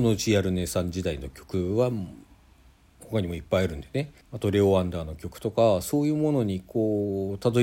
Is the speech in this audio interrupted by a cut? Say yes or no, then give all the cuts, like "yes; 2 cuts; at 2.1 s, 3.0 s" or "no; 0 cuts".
yes; 1 cut; at 4.2 s